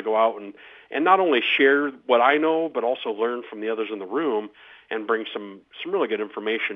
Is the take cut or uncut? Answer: uncut